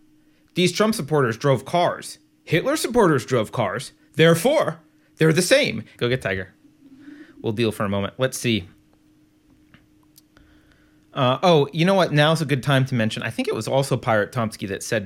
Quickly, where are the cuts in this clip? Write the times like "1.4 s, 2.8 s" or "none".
6.0 s